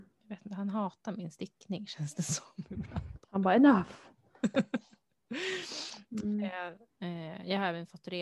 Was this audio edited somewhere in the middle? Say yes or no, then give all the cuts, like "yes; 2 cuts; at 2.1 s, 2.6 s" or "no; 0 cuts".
yes; 2 cuts; at 3.2 s, 6.9 s